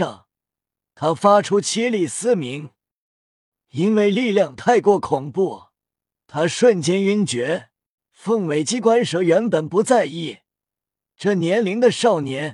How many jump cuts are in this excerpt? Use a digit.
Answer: 1